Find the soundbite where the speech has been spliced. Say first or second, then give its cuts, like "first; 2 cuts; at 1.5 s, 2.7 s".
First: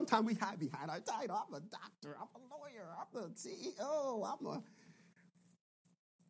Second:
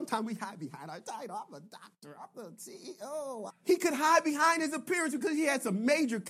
second; 2 cuts; at 2.2 s, 3.5 s